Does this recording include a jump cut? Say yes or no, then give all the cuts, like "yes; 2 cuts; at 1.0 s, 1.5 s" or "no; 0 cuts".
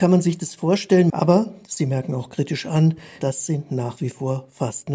yes; 2 cuts; at 1.1 s, 3.2 s